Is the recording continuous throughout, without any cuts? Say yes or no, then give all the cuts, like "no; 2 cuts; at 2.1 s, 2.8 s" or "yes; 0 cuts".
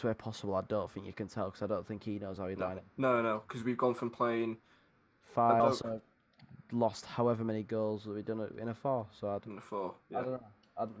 no; 1 cut; at 5.6 s